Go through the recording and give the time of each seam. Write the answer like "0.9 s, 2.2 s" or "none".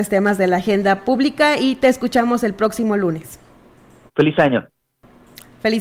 4.1 s

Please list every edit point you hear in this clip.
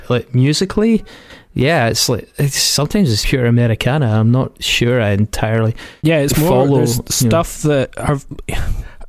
3.2 s

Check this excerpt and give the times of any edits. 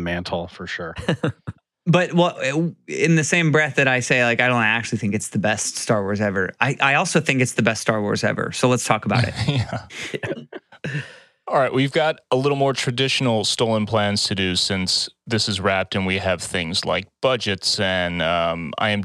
none

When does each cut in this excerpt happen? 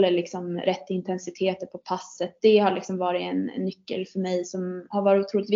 none

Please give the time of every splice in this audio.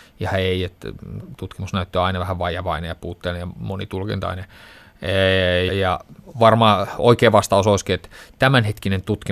5.7 s

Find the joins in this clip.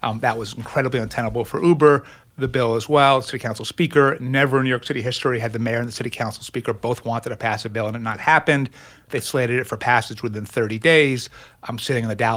2.2 s

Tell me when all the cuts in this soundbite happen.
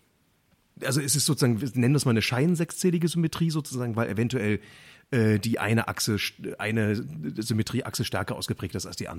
none

